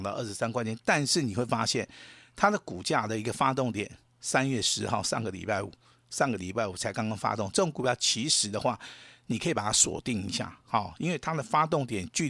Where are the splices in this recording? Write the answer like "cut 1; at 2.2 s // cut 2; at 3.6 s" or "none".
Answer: none